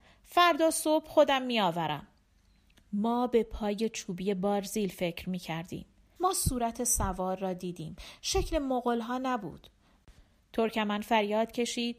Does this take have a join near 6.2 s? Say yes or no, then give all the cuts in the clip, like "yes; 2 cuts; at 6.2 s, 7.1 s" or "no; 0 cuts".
yes; 2 cuts; at 6.2 s, 10.4 s